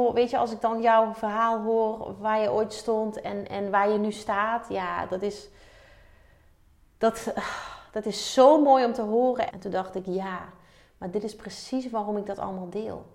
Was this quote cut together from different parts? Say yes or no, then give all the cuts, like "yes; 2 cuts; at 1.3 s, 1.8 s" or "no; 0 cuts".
yes; 1 cut; at 9.5 s